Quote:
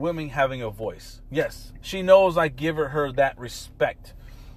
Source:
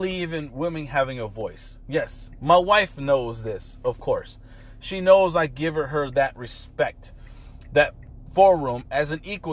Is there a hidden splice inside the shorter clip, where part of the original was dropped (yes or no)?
yes